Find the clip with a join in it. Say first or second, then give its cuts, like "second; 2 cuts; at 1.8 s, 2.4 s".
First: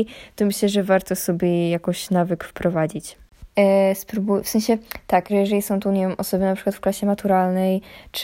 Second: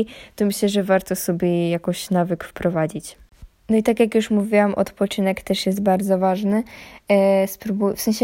first; 2 cuts; at 3.5 s, 5.3 s